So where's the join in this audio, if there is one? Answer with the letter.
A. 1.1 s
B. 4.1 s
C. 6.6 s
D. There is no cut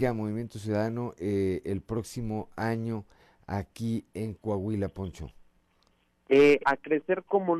D